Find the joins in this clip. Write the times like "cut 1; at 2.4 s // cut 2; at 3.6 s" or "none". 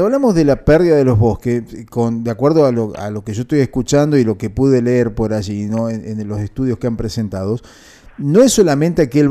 none